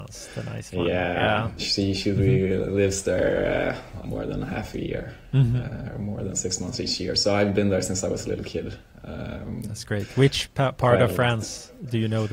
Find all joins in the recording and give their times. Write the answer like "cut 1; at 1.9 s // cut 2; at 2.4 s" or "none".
cut 1; at 1.6 s // cut 2; at 4.0 s

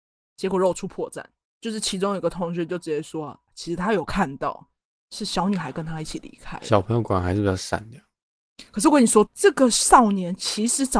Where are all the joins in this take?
cut 1; at 9.3 s

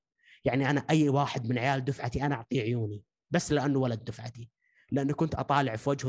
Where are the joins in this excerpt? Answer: none

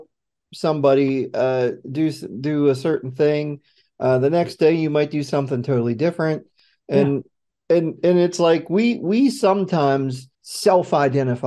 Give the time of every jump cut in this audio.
cut 1; at 10.3 s

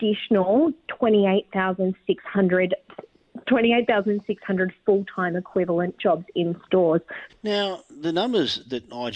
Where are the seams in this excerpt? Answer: cut 1; at 7.3 s

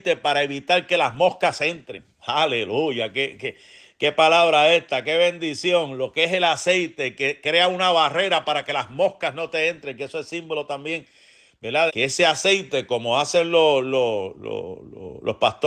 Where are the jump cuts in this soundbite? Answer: cut 1; at 11.9 s

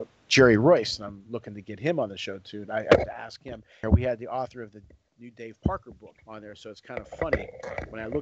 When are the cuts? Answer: cut 1; at 3.8 s // cut 2; at 6.2 s

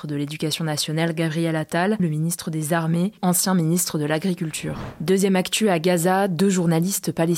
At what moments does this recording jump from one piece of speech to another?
cut 1; at 2.0 s // cut 2; at 3.2 s

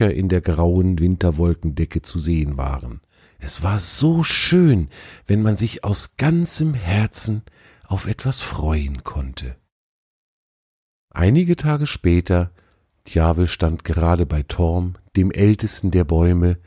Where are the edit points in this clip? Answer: cut 1; at 3.2 s

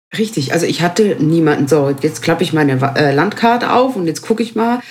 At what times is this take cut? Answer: cut 1; at 1.7 s

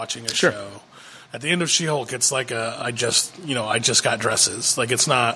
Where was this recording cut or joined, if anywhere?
cut 1; at 1.3 s

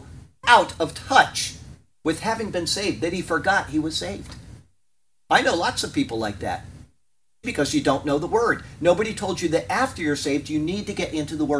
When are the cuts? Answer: cut 1; at 7.4 s

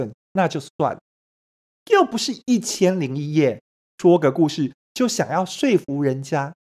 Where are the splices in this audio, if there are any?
cut 1; at 1.8 s

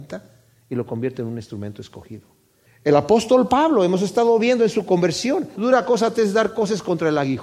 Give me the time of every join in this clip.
cut 1; at 2.7 s // cut 2; at 5.6 s

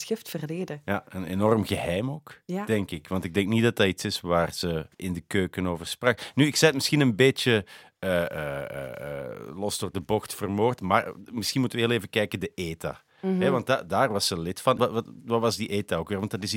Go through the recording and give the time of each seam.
cut 1; at 4.9 s // cut 2; at 14.8 s

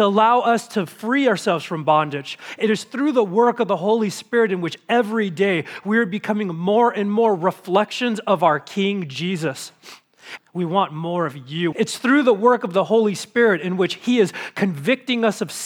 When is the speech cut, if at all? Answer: cut 1; at 10.4 s // cut 2; at 11.7 s

